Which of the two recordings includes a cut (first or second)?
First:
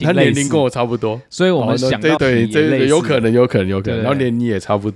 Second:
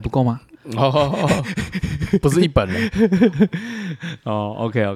first